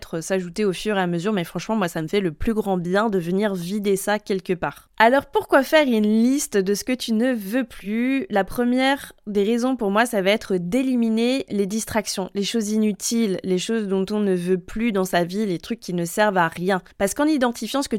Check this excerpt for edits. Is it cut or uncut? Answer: uncut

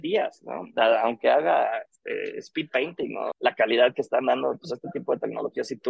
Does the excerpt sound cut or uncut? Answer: cut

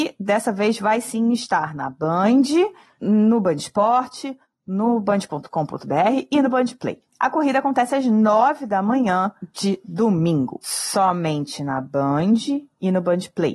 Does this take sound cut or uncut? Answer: uncut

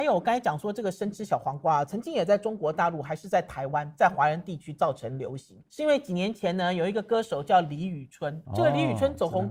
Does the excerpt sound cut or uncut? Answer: cut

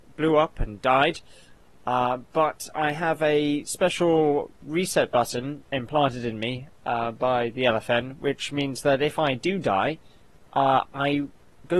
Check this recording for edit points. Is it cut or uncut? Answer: uncut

